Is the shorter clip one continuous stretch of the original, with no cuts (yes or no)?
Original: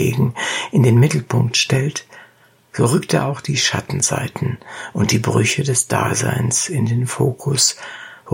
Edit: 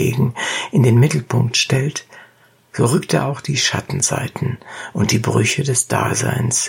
yes